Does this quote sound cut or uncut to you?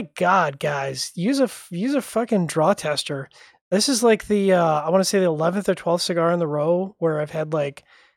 uncut